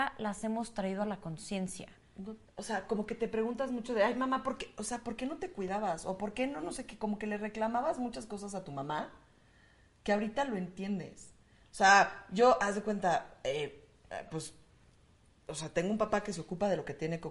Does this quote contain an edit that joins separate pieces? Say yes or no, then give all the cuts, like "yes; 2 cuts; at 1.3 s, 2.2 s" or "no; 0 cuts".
yes; 1 cut; at 2.5 s